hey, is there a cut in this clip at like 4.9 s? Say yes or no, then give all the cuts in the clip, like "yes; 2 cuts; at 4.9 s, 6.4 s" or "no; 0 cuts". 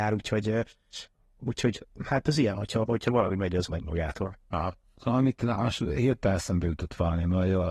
yes; 1 cut; at 4.9 s